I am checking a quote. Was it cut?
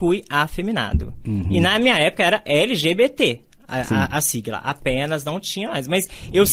no; 0 cuts

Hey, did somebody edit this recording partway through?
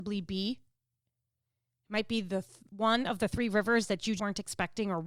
yes; 1 cut; at 4.2 s

